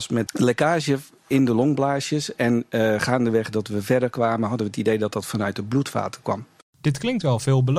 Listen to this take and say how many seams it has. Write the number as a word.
zero